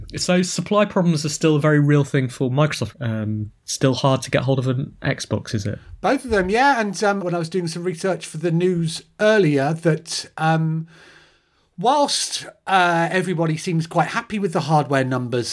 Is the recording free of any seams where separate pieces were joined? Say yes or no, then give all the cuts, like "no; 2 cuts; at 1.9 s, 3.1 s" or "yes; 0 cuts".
no; 2 cuts; at 2.9 s, 7.2 s